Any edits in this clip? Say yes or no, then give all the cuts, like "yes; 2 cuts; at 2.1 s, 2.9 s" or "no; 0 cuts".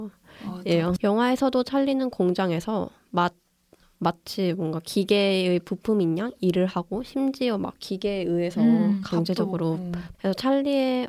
yes; 2 cuts; at 1.0 s, 10.1 s